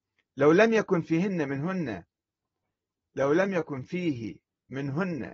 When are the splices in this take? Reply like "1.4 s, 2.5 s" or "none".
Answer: none